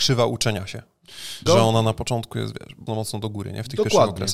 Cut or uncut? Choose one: cut